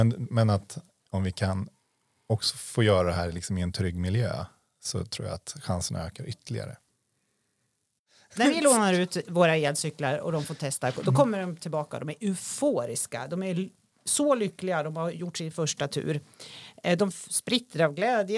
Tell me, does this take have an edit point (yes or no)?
no